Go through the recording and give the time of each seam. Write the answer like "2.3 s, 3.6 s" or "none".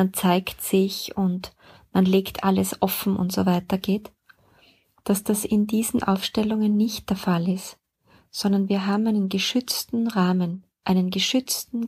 none